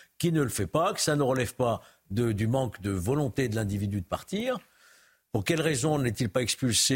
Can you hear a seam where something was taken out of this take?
no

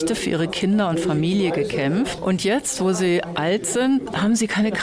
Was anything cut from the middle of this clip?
no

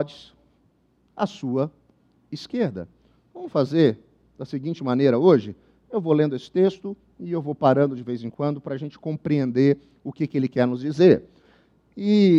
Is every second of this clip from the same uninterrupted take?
yes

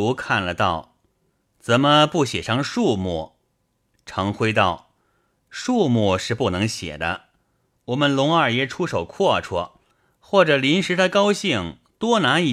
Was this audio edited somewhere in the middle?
no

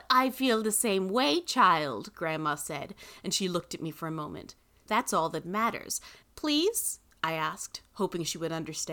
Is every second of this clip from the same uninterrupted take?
no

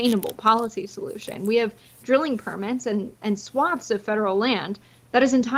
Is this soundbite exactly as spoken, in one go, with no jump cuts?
yes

